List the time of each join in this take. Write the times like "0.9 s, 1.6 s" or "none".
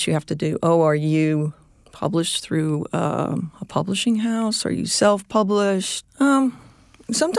6.0 s